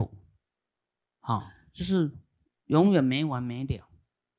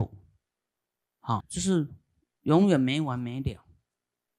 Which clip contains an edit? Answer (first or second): second